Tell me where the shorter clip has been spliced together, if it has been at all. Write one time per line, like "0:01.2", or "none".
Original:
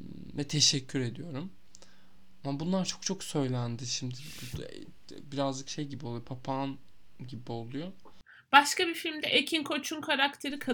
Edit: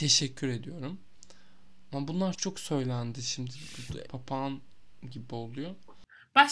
0:02.3
0:04.1